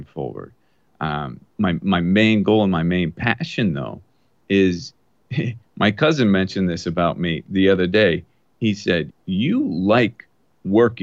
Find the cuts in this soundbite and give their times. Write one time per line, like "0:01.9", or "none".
0:01.5
0:09.1